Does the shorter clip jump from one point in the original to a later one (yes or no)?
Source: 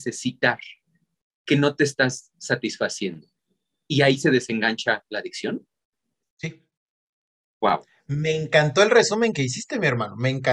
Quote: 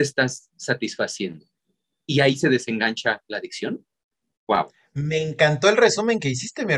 yes